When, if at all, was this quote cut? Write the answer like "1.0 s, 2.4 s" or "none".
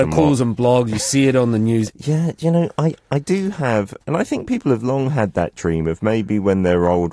1.9 s

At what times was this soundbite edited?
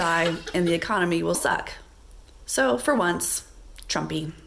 1.3 s

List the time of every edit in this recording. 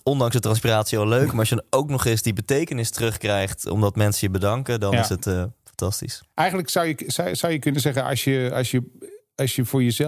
none

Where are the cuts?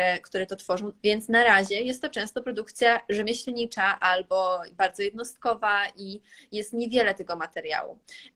1.0 s

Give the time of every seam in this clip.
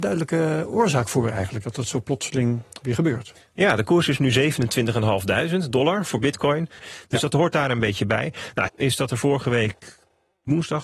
6.8 s, 8.7 s

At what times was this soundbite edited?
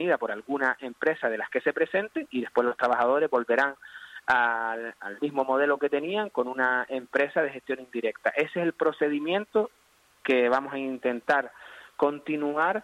5.0 s

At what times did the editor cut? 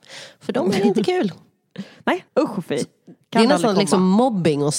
2.3 s

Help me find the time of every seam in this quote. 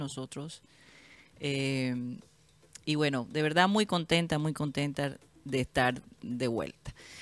1.3 s

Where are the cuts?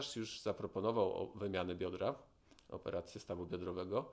none

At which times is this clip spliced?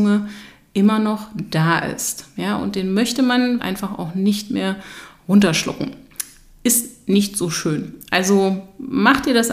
3.6 s

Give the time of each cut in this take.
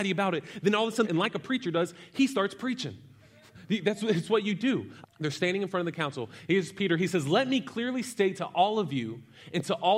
1.0 s, 5.0 s

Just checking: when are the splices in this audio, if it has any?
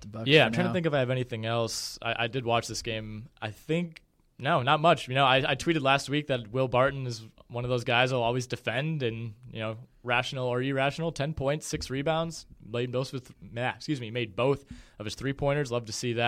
none

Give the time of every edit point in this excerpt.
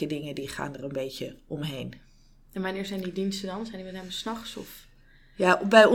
none

